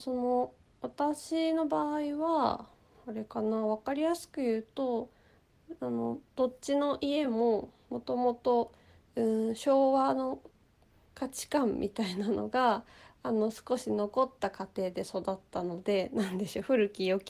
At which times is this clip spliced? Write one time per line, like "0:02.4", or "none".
none